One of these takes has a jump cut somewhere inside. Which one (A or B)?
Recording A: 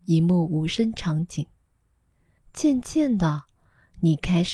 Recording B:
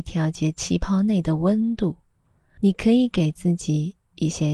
A